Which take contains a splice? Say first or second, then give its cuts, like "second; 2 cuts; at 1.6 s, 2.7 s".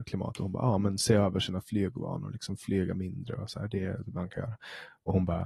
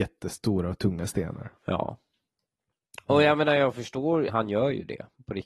second; 2 cuts; at 1.6 s, 4.3 s